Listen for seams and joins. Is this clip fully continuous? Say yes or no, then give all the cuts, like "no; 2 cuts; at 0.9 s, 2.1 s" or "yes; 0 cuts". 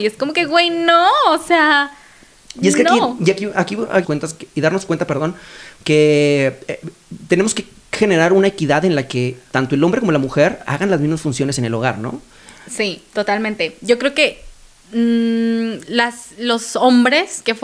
no; 1 cut; at 4.0 s